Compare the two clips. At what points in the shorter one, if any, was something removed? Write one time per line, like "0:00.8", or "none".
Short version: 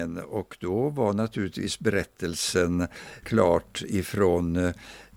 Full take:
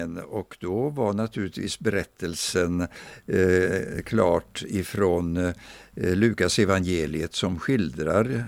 0:03.2